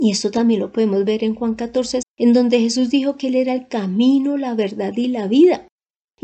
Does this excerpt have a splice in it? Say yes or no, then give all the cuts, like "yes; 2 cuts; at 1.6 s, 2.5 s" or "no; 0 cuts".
yes; 1 cut; at 2.0 s